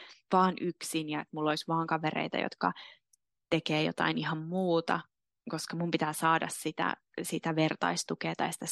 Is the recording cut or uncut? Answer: uncut